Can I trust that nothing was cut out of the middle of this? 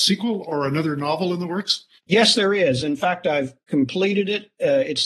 no; 1 cut; at 2.0 s

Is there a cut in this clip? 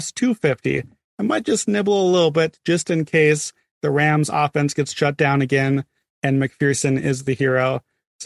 yes; 1 cut; at 1.1 s

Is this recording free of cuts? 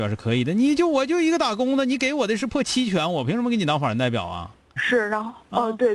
no; 1 cut; at 4.8 s

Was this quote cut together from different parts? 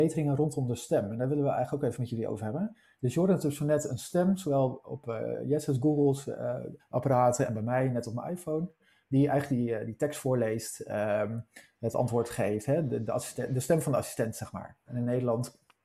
yes; 3 cuts; at 2.9 s, 6.8 s, 14.9 s

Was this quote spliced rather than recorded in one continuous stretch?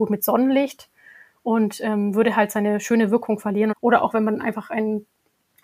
yes; 1 cut; at 3.7 s

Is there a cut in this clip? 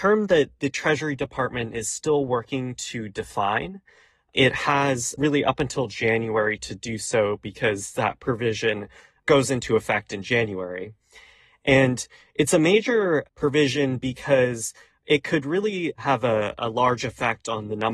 no; 0 cuts

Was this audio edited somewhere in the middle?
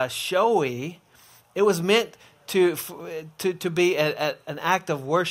no; 0 cuts

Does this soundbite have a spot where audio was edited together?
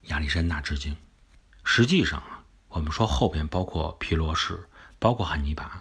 yes; 1 cut; at 1.5 s

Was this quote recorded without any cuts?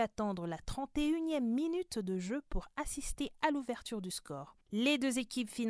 no; 1 cut; at 4.6 s

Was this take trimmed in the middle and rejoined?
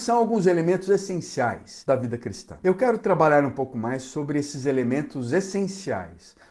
no; 0 cuts

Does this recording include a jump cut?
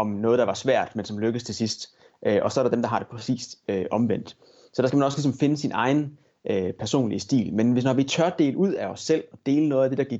no; 0 cuts

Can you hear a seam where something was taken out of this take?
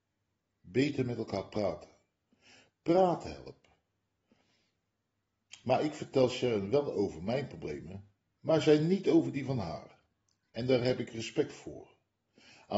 no; 0 cuts

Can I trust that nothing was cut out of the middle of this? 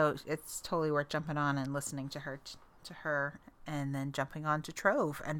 yes; 0 cuts

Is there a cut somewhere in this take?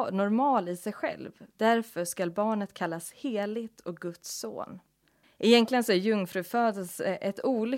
yes; 2 cuts; at 1.5 s, 5.2 s

